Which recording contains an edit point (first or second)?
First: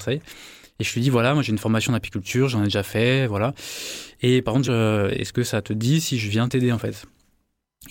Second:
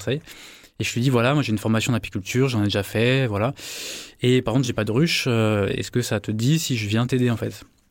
first